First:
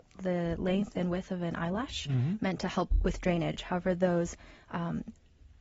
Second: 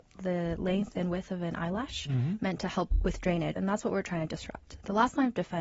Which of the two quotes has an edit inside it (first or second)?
second